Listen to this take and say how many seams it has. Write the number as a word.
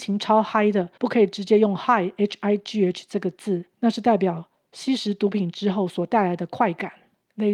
zero